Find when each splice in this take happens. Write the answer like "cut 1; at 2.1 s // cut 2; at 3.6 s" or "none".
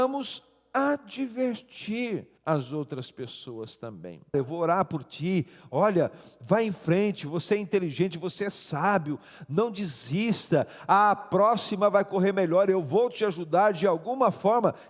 cut 1; at 2.4 s // cut 2; at 4.3 s

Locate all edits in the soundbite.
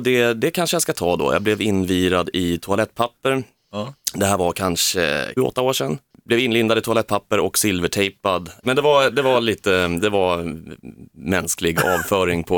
cut 1; at 5.4 s // cut 2; at 8.6 s

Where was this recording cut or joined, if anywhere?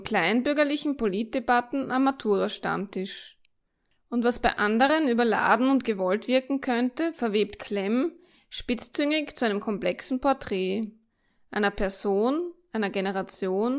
none

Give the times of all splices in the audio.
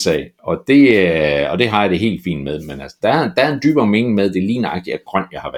none

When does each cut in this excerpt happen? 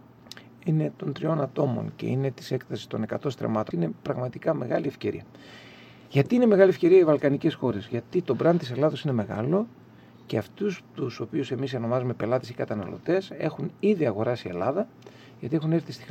cut 1; at 3.7 s

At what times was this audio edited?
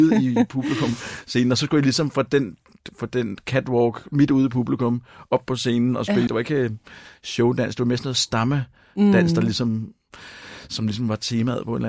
cut 1; at 6.3 s

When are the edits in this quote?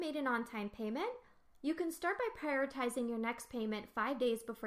none

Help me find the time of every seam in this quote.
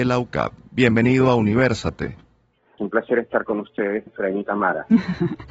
cut 1; at 2.8 s // cut 2; at 4.1 s

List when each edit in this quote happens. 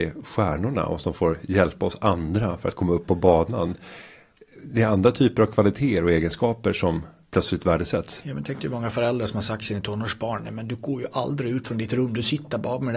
none

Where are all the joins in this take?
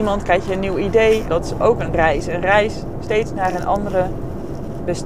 cut 1; at 1.3 s

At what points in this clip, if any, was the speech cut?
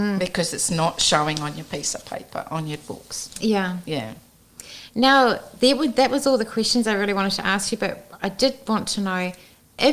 none

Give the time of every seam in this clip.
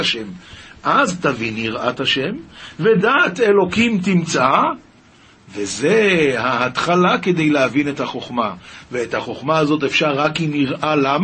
none

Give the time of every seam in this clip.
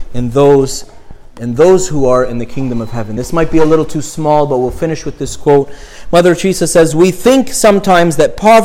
none

